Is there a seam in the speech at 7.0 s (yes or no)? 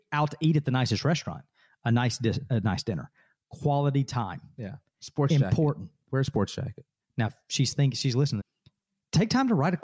yes